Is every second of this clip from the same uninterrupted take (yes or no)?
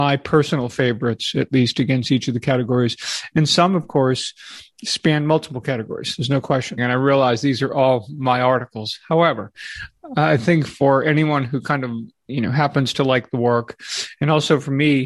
no